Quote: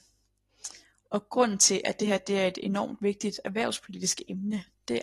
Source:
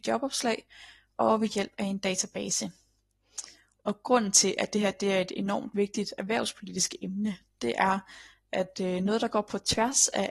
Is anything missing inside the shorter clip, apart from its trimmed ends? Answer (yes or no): no